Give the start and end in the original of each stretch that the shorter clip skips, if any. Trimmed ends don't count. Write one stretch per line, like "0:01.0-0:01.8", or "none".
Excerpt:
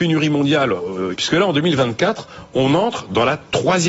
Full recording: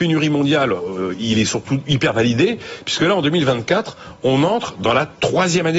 0:01.2-0:02.8